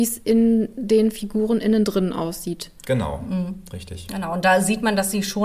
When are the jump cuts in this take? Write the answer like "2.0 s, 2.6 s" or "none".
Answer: none